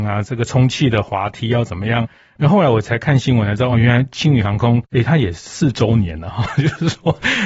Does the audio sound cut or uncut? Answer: uncut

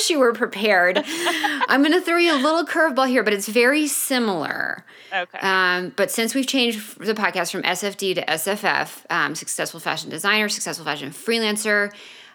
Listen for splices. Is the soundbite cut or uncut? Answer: uncut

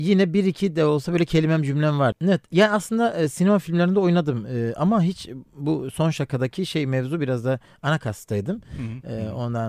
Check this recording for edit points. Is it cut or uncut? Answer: cut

